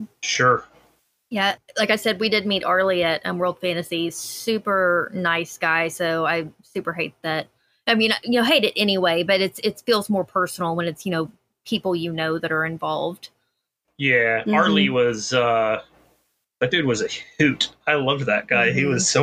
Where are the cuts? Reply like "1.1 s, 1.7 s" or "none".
none